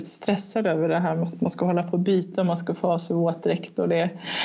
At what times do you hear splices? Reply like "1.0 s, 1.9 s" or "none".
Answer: none